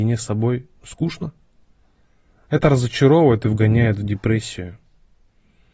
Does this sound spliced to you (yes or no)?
no